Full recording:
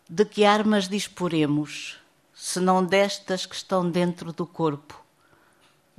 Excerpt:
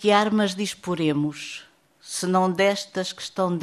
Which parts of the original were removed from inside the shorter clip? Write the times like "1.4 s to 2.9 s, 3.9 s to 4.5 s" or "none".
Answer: none